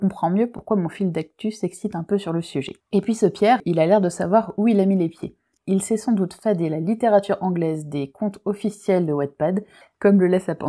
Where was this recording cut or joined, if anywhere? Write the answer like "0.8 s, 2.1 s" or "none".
2.8 s